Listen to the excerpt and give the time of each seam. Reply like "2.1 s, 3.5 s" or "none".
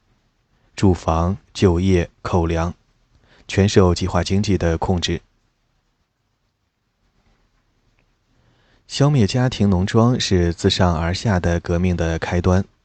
1.5 s